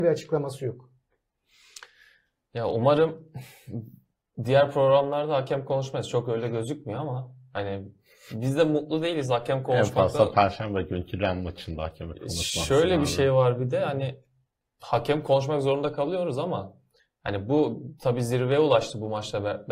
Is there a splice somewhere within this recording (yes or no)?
no